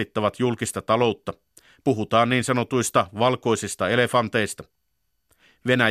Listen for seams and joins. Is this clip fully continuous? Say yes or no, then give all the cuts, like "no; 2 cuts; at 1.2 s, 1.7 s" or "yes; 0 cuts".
yes; 0 cuts